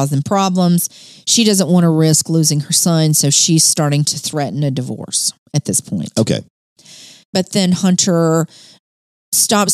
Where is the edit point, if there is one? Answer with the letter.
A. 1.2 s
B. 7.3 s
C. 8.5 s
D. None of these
B